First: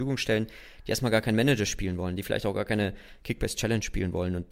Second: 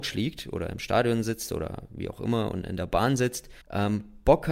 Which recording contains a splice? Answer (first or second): second